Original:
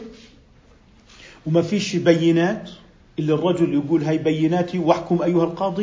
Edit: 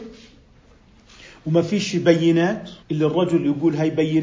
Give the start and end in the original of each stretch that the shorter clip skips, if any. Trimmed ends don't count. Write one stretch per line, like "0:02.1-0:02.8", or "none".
0:02.8-0:03.1